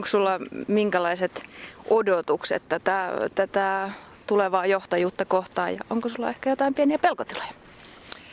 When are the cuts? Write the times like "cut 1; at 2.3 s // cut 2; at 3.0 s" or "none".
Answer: none